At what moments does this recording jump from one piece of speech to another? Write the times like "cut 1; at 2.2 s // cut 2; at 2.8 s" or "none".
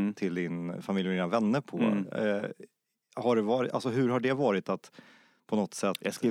none